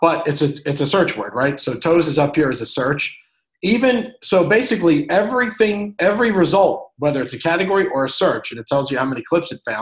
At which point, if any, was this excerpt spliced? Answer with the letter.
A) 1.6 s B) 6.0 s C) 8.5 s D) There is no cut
D